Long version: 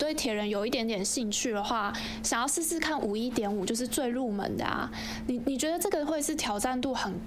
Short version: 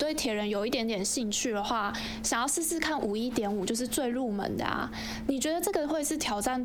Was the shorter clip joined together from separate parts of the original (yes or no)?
yes